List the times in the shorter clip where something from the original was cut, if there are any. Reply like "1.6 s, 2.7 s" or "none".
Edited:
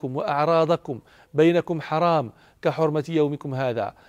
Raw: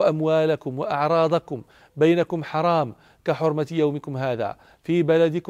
none